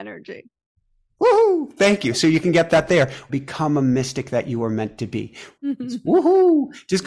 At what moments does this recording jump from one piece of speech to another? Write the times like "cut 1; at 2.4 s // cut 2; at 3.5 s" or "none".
cut 1; at 3.3 s // cut 2; at 5.6 s